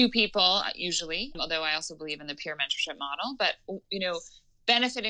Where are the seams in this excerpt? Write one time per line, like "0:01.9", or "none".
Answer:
0:01.3

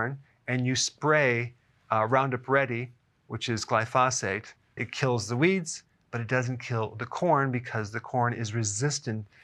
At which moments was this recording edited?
0:04.8

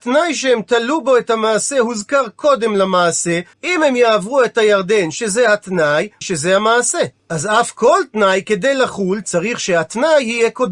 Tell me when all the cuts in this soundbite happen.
0:03.5
0:06.2

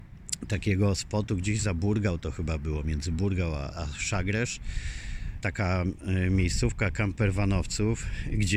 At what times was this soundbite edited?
0:03.7
0:05.4

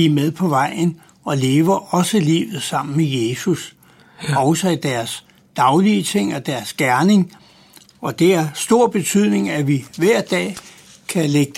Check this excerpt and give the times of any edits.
none

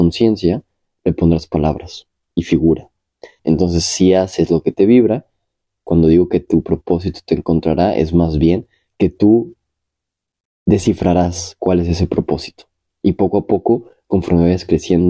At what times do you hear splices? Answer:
0:03.4

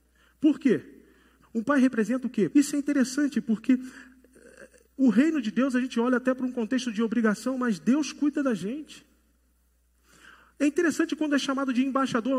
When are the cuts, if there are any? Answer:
0:01.4
0:02.5

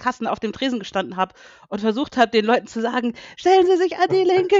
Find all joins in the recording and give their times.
0:03.3

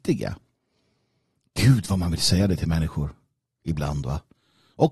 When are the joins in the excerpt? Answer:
none

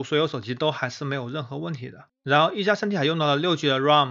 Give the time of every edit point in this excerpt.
none

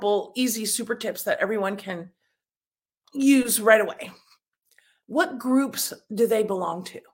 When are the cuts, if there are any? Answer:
0:05.0

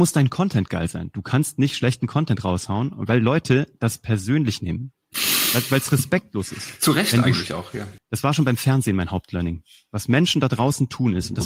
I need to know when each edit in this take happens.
0:08.0

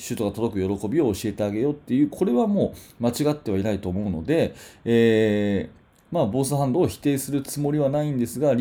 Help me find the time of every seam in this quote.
none

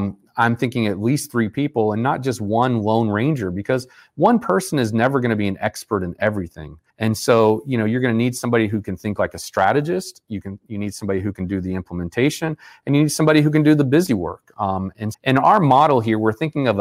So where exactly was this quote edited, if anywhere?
0:06.9
0:15.1

